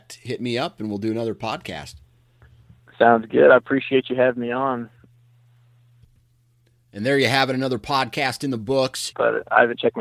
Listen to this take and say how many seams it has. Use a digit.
1